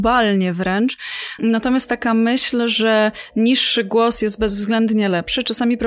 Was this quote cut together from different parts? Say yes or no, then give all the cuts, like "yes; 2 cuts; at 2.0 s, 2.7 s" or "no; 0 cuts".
yes; 1 cut; at 1.4 s